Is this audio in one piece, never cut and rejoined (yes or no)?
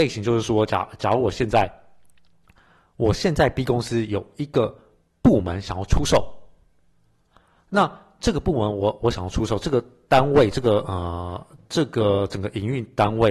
yes